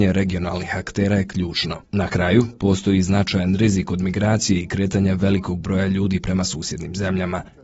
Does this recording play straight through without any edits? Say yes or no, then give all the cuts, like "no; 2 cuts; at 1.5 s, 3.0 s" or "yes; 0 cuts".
no; 1 cut; at 1.8 s